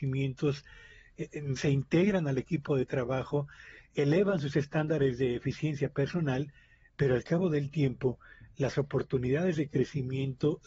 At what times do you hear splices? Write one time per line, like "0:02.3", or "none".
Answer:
0:01.6